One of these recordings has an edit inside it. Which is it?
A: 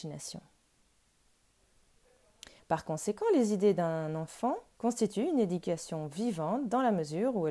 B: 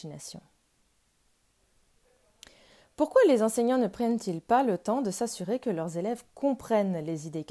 A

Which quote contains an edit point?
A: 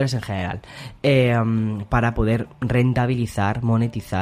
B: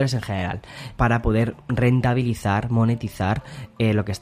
B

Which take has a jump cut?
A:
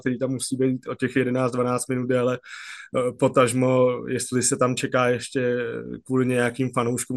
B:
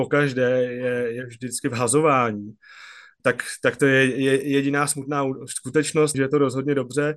B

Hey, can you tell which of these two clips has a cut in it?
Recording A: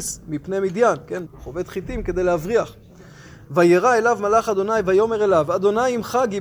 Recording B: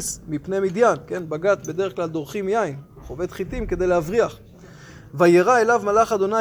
A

